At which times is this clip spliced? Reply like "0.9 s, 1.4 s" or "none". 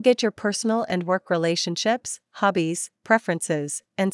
none